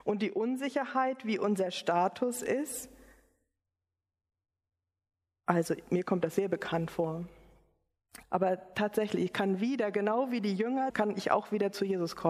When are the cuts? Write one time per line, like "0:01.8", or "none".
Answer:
0:08.2
0:10.9